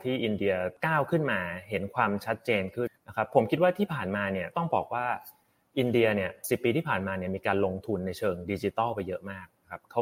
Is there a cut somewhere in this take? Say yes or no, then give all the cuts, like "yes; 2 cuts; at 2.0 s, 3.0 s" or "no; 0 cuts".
yes; 1 cut; at 2.9 s